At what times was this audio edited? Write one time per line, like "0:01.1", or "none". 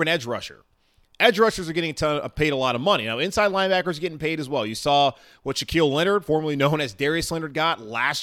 none